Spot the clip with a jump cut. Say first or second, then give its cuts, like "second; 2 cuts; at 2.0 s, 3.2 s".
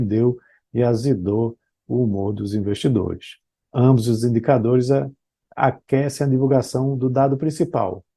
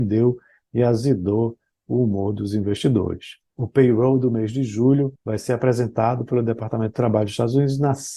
second; 2 cuts; at 3.5 s, 5.2 s